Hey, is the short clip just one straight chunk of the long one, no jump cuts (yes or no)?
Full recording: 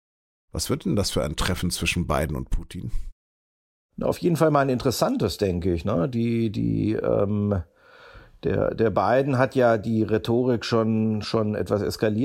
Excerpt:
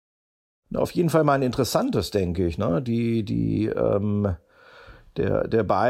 yes